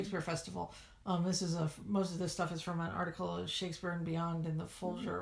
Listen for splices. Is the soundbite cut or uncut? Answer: uncut